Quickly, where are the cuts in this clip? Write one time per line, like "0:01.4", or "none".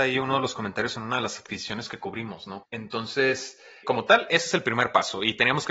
0:02.6
0:03.8